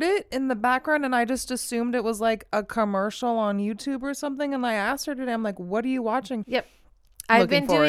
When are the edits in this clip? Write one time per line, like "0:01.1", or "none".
0:06.4